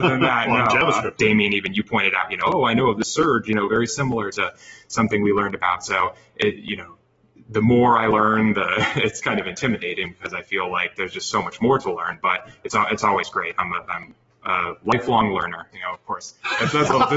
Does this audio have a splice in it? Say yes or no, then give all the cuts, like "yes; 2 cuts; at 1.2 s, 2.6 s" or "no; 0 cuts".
yes; 2 cuts; at 1.2 s, 15.7 s